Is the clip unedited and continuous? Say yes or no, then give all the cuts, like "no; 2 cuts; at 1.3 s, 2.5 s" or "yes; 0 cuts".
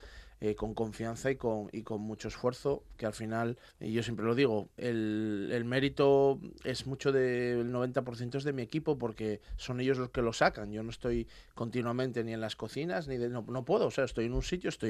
no; 1 cut; at 3.7 s